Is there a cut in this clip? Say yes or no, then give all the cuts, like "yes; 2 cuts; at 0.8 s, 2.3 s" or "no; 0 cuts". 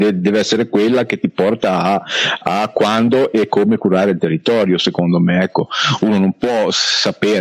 no; 0 cuts